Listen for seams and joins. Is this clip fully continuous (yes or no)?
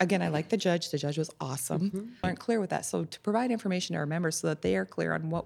no